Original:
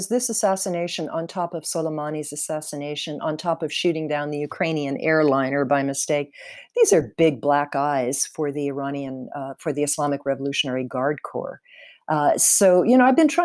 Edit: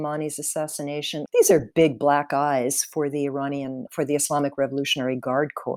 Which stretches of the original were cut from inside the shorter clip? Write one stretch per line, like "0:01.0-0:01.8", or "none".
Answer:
0:03.2-0:06.7
0:09.3-0:09.5